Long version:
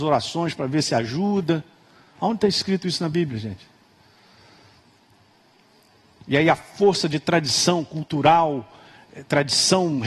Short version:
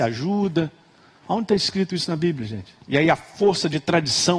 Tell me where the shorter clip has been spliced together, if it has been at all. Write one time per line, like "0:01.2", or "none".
0:02.8